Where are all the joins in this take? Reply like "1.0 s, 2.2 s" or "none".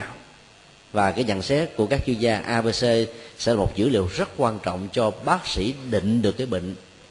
none